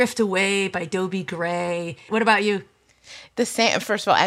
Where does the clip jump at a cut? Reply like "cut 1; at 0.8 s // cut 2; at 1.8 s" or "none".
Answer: cut 1; at 2.1 s